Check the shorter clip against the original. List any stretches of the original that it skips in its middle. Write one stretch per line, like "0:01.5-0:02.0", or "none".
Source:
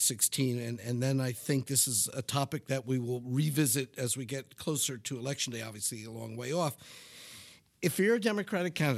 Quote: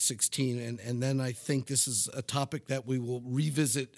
none